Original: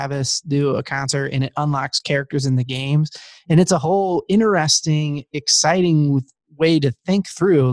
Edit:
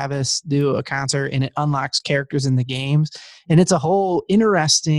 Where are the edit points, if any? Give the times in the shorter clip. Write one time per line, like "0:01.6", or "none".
none